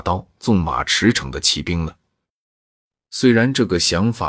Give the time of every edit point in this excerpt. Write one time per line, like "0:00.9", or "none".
0:03.0